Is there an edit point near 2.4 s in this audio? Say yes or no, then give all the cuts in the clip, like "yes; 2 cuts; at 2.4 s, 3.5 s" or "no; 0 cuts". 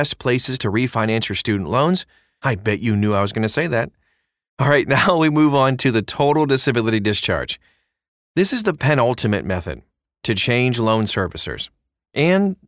yes; 1 cut; at 2.4 s